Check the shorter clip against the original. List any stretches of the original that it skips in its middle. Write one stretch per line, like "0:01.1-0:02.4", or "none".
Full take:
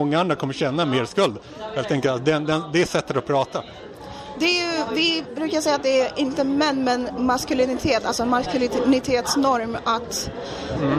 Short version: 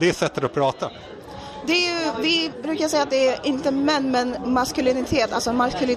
none